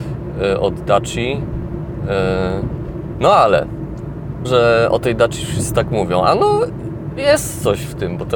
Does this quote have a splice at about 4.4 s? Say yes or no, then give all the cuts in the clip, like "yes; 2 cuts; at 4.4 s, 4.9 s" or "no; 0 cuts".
yes; 2 cuts; at 3.1 s, 4.4 s